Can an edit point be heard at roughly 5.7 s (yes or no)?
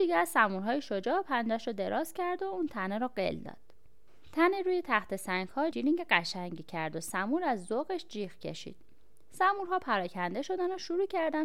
yes